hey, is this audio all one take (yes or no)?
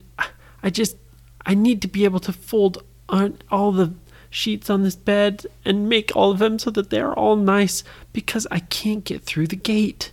yes